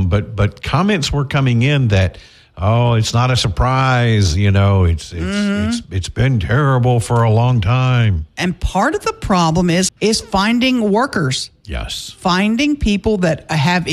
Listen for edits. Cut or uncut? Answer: cut